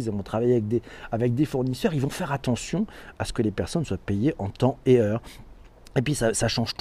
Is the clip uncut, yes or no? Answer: yes